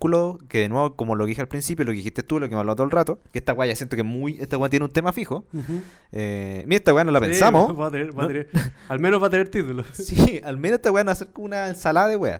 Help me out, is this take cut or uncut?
uncut